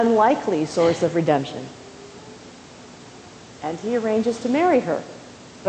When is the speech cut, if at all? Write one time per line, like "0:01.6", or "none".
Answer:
0:03.4